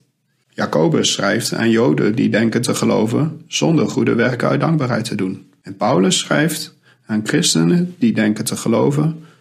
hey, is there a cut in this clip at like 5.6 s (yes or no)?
no